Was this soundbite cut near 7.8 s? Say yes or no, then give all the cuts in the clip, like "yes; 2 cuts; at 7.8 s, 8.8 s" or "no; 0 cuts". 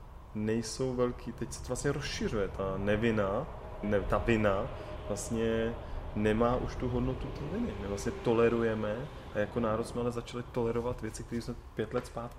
no; 1 cut; at 3.8 s